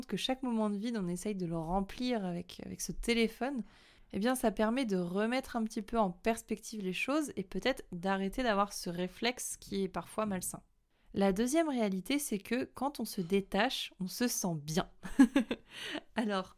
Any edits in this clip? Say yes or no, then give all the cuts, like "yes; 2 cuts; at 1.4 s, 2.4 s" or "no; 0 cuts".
no; 0 cuts